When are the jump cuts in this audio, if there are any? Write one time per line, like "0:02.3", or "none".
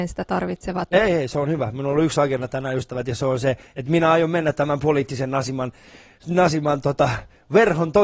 0:00.9